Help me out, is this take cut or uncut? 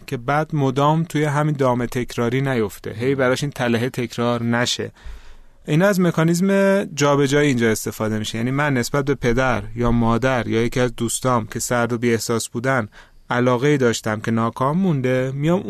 uncut